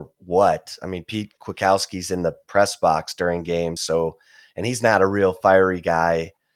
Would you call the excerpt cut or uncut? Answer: uncut